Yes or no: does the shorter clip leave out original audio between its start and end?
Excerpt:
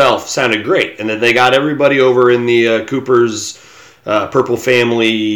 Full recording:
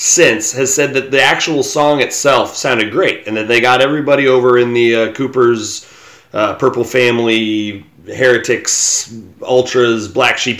no